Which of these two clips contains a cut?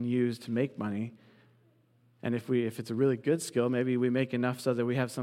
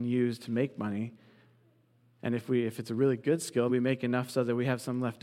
second; 1 cut; at 3.7 s

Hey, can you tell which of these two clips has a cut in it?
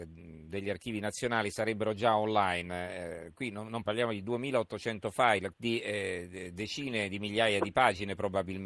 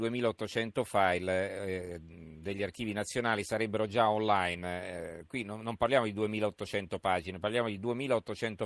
first; 2 cuts; at 3.8 s, 5.5 s

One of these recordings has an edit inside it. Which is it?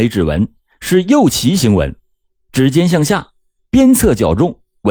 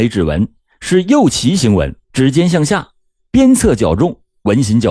second; 1 cut; at 2.0 s

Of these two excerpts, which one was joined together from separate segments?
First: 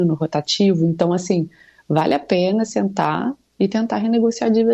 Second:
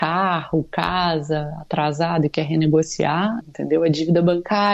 second; 1 cut; at 3.4 s

